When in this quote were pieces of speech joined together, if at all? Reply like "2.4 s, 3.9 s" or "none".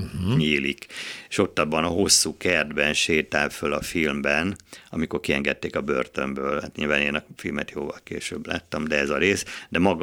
none

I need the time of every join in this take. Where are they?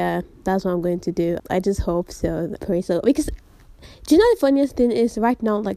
1.4 s, 2.6 s

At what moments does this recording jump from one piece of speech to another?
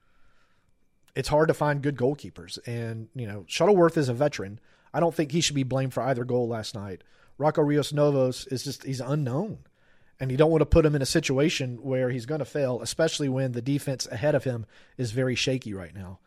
none

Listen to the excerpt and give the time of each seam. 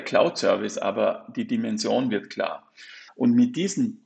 3.1 s

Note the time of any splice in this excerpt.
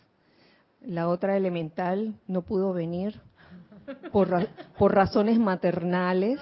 2.2 s

